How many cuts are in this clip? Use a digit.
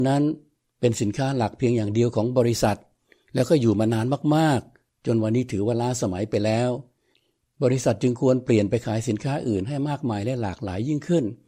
0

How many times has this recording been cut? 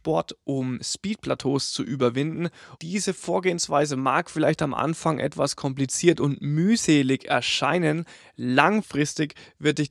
1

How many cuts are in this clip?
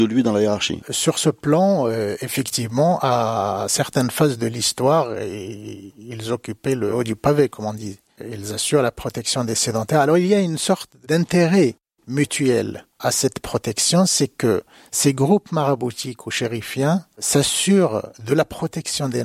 0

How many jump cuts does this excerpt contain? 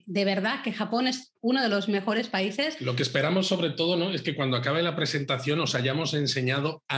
0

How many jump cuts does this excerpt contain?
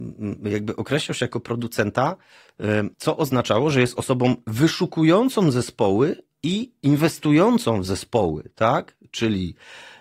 1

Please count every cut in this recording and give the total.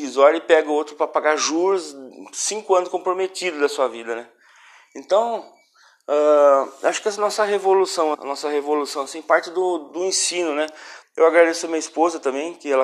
2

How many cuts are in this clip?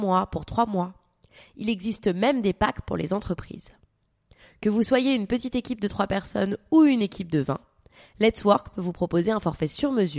0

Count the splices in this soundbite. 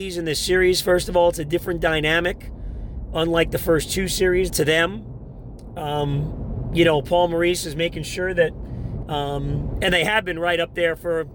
2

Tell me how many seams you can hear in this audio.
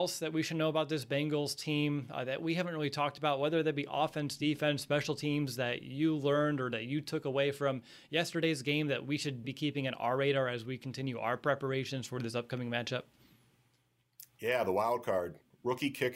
1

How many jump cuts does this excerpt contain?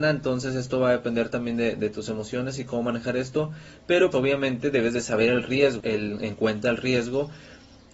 2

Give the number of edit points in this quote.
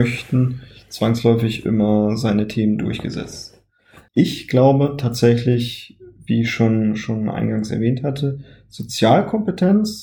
1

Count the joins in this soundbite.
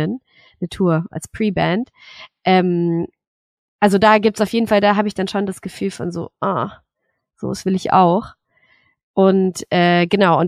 2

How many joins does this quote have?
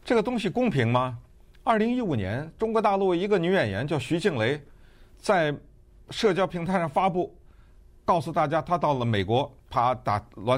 1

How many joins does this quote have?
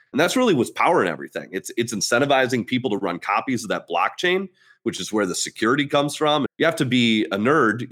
1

